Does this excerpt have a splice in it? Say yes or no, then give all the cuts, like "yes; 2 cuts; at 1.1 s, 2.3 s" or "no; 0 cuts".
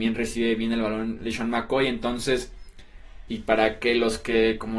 yes; 1 cut; at 3.3 s